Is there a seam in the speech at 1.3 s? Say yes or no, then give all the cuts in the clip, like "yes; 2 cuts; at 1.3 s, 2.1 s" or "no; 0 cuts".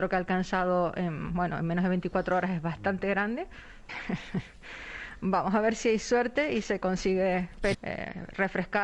no; 2 cuts; at 3.9 s, 7.7 s